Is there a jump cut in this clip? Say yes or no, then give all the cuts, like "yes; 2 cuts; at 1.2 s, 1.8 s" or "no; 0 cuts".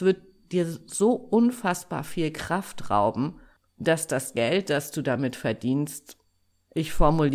no; 0 cuts